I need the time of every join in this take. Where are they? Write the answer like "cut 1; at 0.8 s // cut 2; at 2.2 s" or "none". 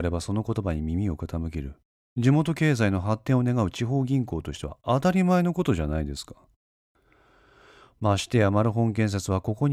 none